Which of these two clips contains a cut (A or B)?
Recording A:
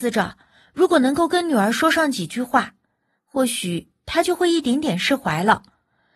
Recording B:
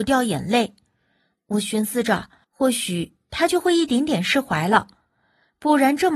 B